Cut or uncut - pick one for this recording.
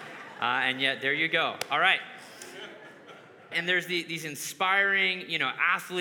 cut